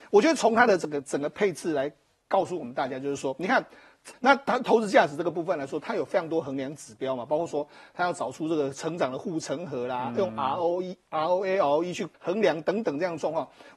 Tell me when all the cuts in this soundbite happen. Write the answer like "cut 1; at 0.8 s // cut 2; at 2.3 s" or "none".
cut 1; at 4.1 s // cut 2; at 12.1 s